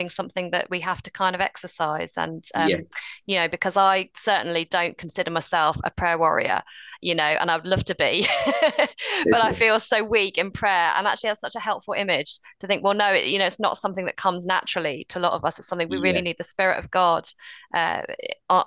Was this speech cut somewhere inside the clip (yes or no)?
no